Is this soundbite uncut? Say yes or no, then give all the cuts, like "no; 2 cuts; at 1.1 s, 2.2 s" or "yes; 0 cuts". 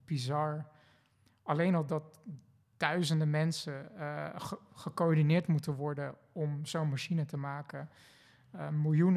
yes; 0 cuts